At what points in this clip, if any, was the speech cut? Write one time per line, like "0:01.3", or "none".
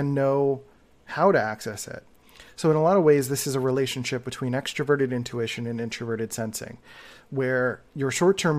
none